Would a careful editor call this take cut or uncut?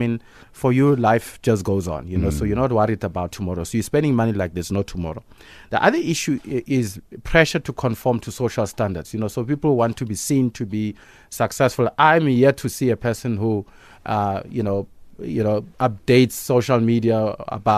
uncut